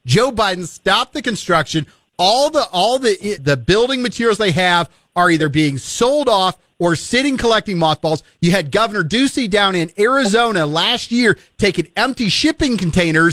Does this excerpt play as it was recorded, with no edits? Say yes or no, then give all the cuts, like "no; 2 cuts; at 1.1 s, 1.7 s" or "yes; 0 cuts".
no; 1 cut; at 3.4 s